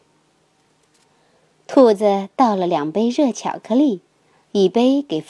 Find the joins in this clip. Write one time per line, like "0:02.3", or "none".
none